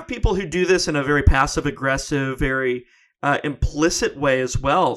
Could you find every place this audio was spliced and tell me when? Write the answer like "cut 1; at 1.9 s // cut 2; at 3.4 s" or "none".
none